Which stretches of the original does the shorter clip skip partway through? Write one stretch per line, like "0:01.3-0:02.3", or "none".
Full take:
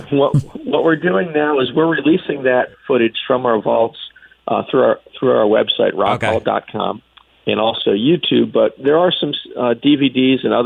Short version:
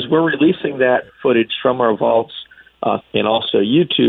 0:04.6-0:07.3

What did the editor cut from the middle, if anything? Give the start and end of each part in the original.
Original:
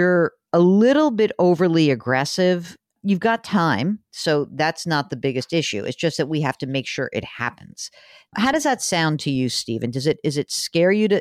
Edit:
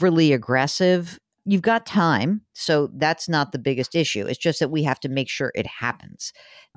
none

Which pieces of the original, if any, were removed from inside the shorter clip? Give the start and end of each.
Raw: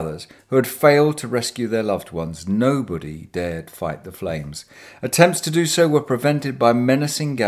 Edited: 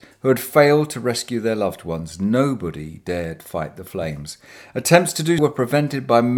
0:05.7-0:05.9

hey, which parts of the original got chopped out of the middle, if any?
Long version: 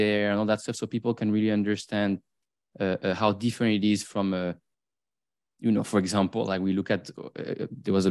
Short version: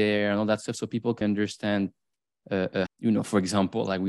0:01.2-0:01.5
0:03.2-0:05.5

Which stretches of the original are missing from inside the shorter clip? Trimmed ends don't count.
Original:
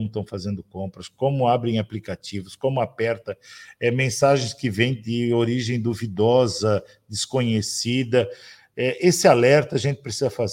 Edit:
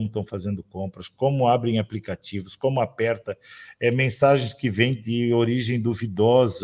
none

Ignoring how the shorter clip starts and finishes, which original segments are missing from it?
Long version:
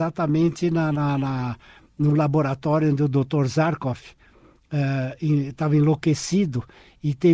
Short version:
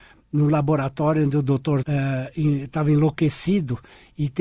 0:03.5-0:04.7

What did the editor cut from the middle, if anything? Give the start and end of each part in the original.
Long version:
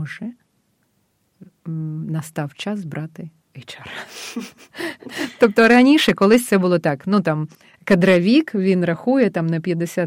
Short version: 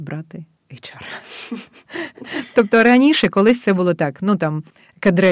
none

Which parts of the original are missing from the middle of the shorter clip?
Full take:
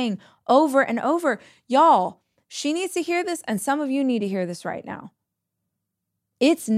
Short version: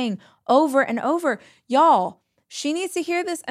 none

